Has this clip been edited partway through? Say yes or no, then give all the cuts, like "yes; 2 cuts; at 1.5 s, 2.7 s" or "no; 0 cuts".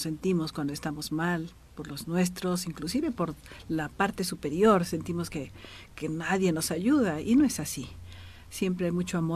no; 0 cuts